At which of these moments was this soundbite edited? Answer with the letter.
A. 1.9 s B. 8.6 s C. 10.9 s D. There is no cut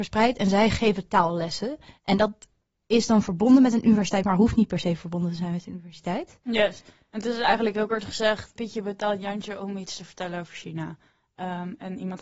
B